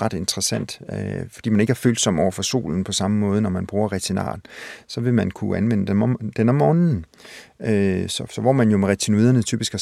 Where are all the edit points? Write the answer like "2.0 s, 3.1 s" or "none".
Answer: none